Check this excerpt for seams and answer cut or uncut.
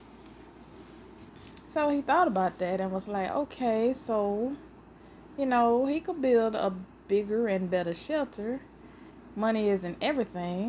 uncut